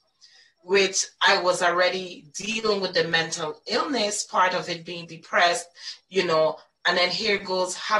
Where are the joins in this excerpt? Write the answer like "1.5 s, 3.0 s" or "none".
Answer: none